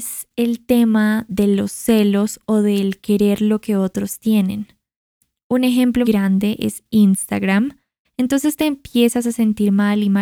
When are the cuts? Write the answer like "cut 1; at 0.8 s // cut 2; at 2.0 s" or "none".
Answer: cut 1; at 6.0 s // cut 2; at 8.0 s